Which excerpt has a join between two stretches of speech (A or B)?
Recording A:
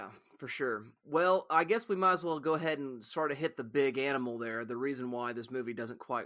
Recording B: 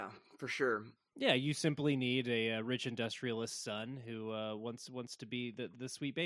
B